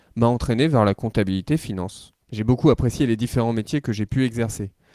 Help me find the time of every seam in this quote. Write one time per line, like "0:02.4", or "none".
0:02.2